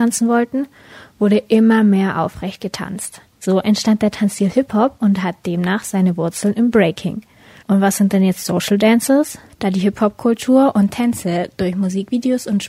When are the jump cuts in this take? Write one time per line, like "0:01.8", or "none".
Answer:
0:07.6
0:09.5